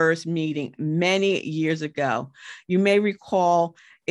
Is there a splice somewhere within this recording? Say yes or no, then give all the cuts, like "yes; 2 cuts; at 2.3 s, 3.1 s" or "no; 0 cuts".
no; 0 cuts